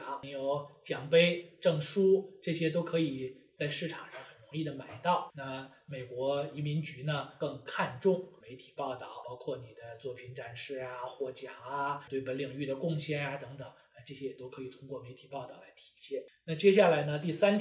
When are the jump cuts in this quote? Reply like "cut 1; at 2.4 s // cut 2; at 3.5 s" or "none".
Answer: none